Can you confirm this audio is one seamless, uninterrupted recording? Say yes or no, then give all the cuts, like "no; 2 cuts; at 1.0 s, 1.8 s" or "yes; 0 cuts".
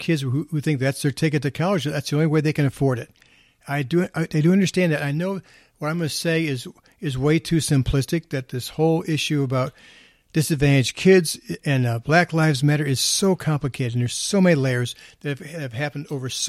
yes; 0 cuts